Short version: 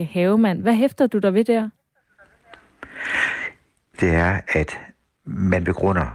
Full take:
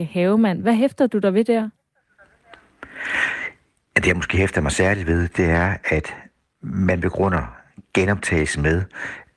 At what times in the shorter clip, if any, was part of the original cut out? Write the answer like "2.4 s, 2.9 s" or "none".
3.9 s